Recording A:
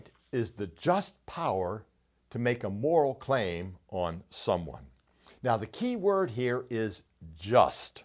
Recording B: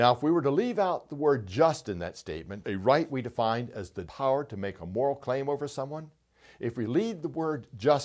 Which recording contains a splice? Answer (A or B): B